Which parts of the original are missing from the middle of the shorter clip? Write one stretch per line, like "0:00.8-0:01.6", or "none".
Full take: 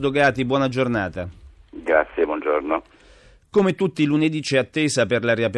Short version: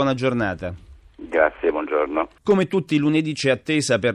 0:02.9-0:03.4